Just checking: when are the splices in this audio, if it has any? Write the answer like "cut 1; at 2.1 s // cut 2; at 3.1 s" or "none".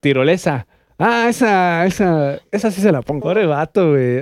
cut 1; at 3.2 s